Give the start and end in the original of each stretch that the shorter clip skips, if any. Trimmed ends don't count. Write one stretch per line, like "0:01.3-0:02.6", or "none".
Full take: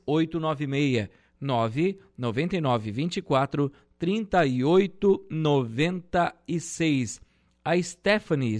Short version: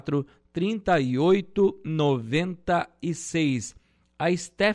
none